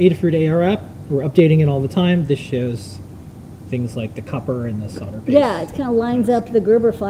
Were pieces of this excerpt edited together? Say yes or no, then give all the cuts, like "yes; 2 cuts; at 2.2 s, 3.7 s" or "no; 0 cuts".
no; 0 cuts